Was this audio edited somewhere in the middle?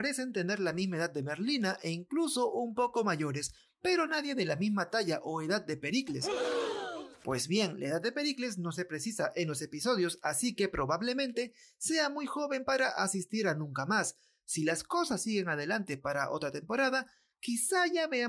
no; 0 cuts

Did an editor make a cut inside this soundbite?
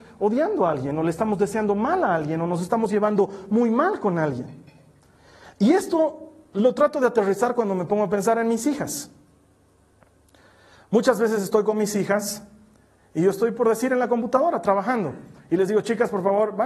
no; 0 cuts

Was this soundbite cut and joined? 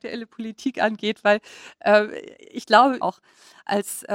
yes; 1 cut; at 3.0 s

